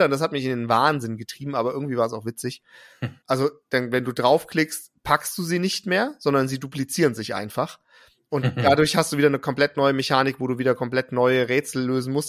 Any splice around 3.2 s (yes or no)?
yes